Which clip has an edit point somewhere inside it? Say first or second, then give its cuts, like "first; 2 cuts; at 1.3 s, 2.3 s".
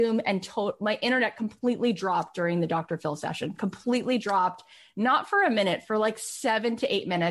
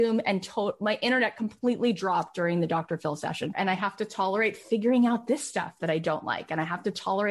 second; 1 cut; at 3.5 s